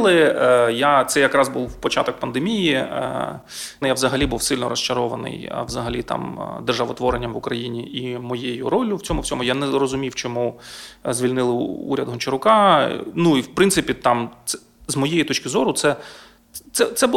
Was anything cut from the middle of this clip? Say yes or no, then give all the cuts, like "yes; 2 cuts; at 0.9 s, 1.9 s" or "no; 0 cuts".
yes; 1 cut; at 3.8 s